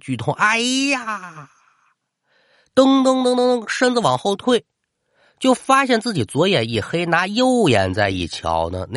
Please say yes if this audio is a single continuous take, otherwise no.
yes